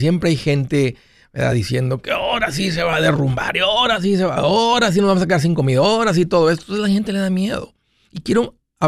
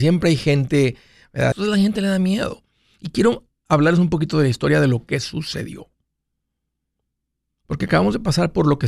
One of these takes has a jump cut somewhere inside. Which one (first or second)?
second